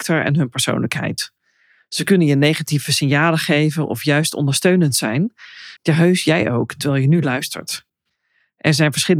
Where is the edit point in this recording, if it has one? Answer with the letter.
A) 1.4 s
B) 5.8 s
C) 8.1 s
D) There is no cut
B